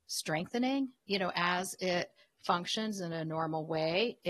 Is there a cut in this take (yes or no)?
yes